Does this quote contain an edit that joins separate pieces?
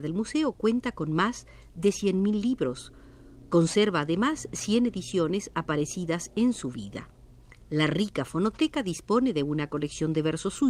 yes; 1 cut; at 7.6 s

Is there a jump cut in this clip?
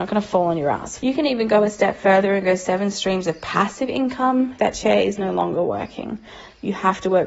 yes; 2 cuts; at 1.0 s, 4.6 s

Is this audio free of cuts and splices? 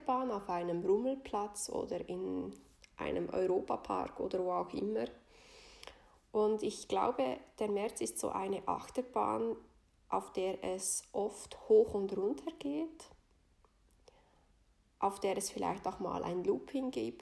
yes; 0 cuts

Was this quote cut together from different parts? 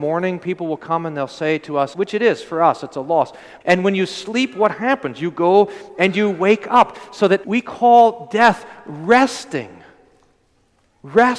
yes; 3 cuts; at 1.9 s, 3.6 s, 7.4 s

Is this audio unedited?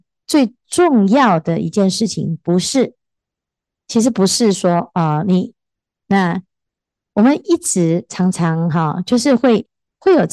no; 1 cut; at 6.0 s

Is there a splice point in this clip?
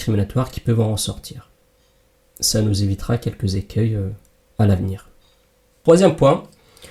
no; 0 cuts

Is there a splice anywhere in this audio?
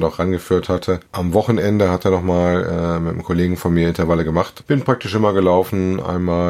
yes; 1 cut; at 4.6 s

